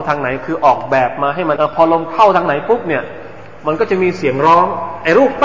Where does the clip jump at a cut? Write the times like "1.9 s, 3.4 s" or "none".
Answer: 1.6 s